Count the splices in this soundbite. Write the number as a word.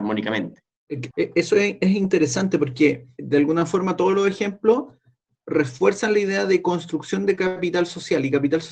one